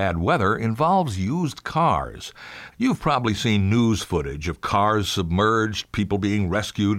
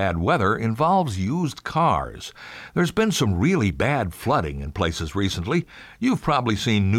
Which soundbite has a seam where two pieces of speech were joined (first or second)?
first